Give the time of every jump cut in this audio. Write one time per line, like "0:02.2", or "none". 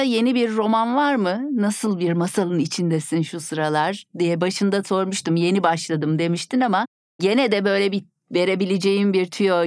none